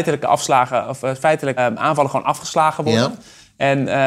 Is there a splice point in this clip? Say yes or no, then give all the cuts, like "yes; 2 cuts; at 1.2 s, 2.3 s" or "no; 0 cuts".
yes; 1 cut; at 1.6 s